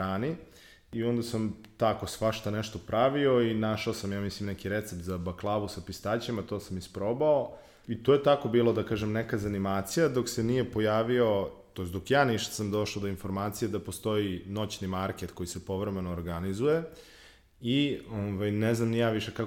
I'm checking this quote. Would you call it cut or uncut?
cut